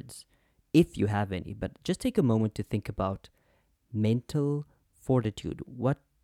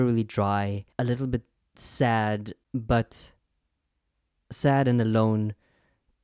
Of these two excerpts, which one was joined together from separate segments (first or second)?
second